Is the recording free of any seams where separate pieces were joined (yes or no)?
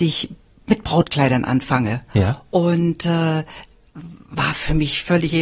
yes